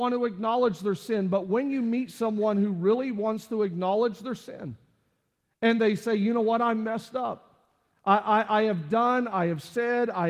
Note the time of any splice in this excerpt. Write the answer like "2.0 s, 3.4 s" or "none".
none